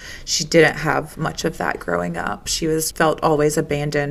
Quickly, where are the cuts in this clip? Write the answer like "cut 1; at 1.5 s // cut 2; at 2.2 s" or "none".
cut 1; at 2.9 s